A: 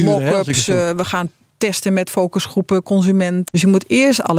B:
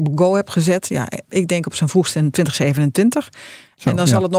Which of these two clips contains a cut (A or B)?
A